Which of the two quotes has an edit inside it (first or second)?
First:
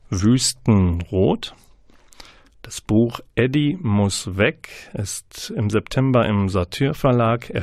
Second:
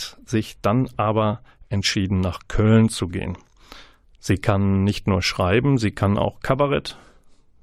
first